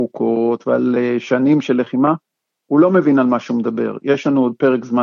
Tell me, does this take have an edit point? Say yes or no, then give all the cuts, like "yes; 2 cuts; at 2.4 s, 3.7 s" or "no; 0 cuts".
no; 0 cuts